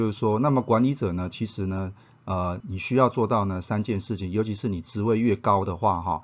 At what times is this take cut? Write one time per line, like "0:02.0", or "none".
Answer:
0:02.6